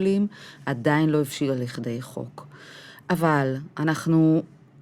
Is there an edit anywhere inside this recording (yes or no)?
no